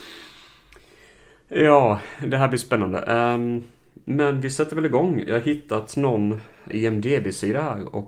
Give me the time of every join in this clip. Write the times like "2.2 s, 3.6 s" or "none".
6.7 s

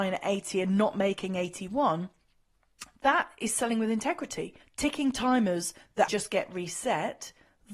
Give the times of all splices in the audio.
4.6 s, 6.1 s

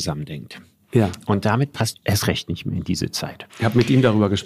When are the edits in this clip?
1.9 s, 3.5 s

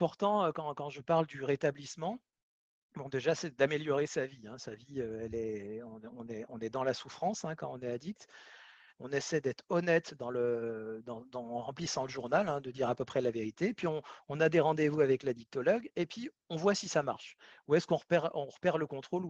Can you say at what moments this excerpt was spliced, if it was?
8.9 s

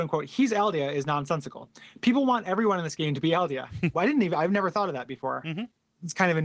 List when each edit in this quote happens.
3.9 s

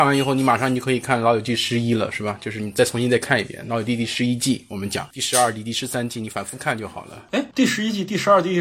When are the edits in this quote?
none

